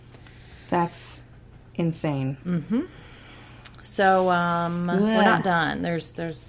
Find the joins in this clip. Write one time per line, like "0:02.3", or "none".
none